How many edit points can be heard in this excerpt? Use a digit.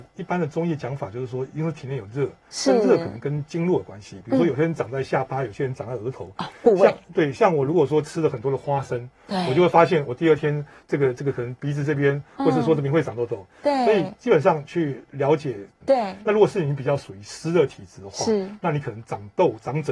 1